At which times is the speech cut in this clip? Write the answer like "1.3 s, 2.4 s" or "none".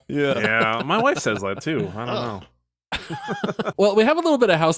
3.7 s